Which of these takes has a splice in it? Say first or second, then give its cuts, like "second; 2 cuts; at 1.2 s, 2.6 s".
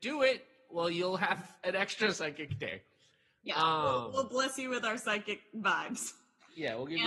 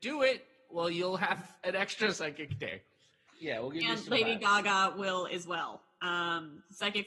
second; 1 cut; at 3.3 s